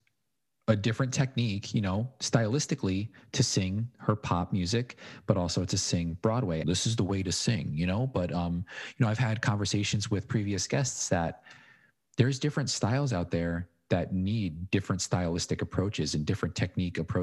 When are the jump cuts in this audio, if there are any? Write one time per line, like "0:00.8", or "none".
0:06.6